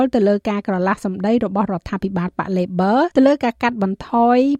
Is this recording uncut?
no; 1 cut; at 3.1 s

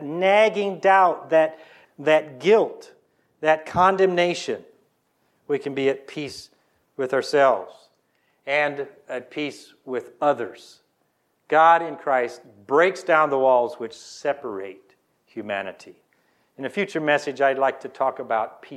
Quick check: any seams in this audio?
yes; 1 cut; at 1.8 s

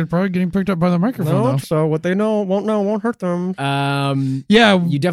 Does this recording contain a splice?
yes; 2 cuts; at 1.6 s, 3.5 s

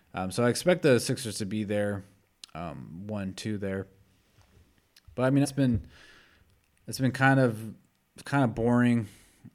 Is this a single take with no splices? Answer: no; 1 cut; at 5.4 s

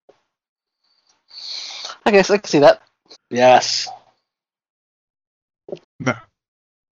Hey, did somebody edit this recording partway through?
yes; 2 cuts; at 3.1 s, 5.8 s

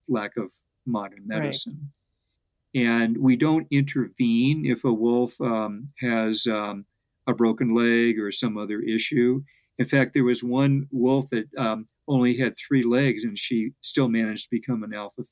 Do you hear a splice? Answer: no; 0 cuts

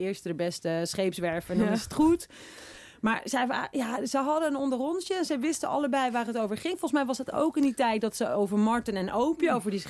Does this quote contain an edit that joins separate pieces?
no; 0 cuts

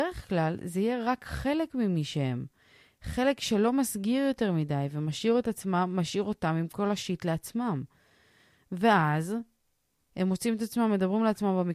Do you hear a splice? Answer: no; 0 cuts

